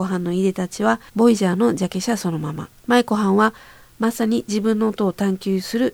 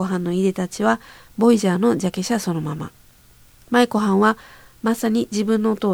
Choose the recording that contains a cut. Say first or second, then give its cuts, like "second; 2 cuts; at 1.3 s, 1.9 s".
first; 2 cuts; at 1.1 s, 2.8 s